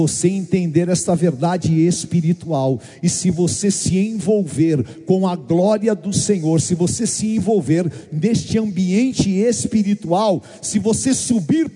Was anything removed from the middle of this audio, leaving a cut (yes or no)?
no